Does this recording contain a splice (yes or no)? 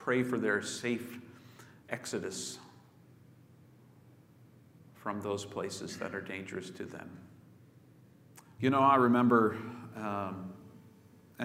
yes